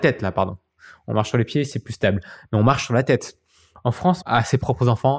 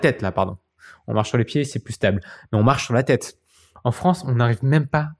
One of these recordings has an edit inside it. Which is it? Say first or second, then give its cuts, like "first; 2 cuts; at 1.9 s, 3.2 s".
first; 1 cut; at 4.2 s